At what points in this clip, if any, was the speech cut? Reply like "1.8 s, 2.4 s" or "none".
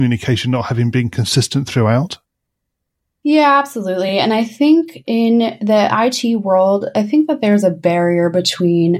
none